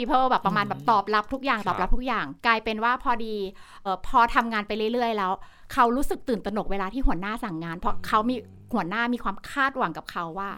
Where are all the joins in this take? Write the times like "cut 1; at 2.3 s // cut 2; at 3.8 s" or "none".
cut 1; at 3.9 s